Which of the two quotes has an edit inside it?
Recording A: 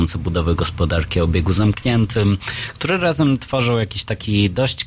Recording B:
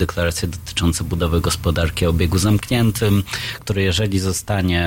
B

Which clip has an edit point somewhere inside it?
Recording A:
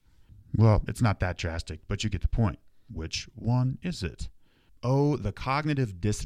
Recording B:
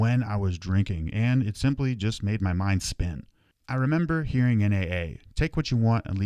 A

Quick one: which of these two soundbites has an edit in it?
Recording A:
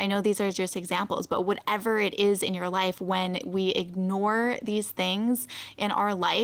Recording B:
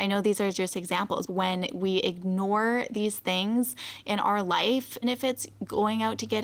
B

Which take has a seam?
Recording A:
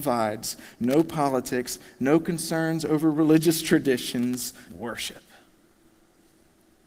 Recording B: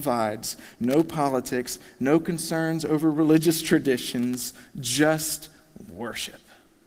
A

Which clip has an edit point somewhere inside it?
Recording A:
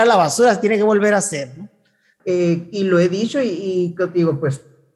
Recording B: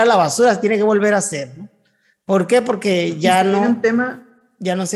A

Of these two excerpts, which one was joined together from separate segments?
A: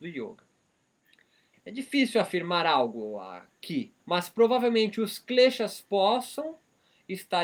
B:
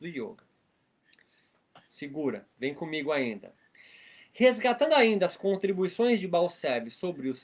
A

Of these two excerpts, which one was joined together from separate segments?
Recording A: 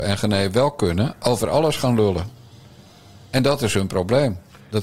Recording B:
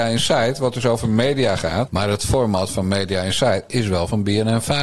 B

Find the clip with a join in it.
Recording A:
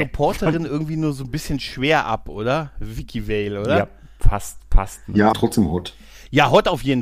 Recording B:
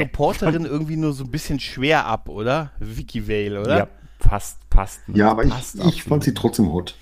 A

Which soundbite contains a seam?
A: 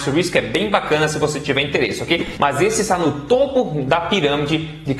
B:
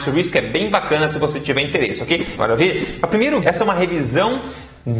B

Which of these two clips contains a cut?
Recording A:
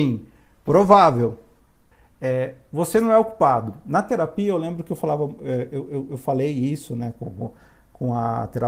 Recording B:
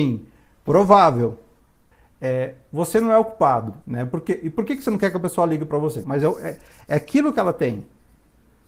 B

